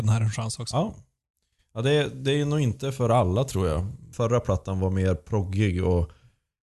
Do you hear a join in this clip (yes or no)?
yes